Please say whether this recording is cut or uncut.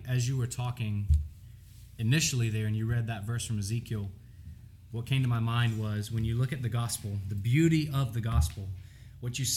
uncut